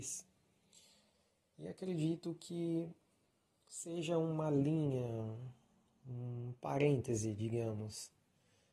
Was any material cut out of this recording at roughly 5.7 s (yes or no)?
no